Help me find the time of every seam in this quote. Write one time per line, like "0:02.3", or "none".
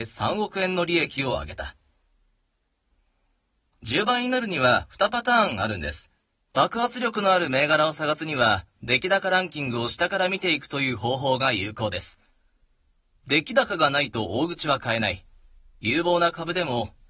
0:06.4